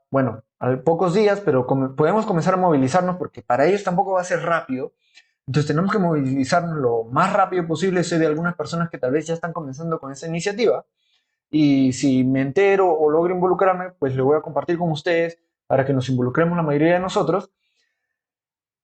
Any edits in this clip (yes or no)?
no